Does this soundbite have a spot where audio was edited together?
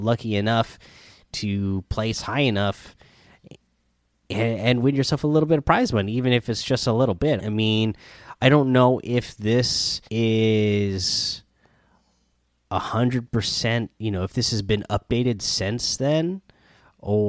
yes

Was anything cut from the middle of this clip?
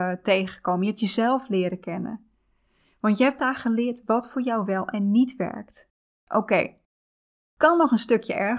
yes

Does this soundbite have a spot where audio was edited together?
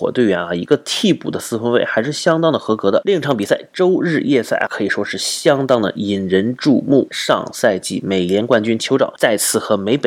yes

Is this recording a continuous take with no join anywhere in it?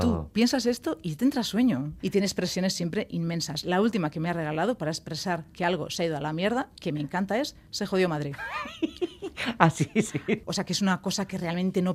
no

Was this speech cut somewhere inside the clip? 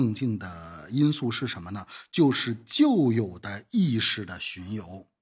no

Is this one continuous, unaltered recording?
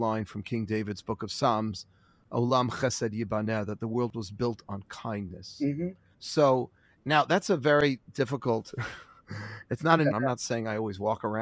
no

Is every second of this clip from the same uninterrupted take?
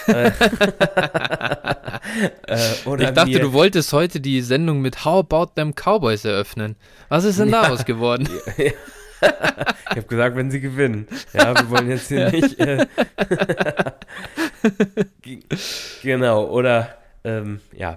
yes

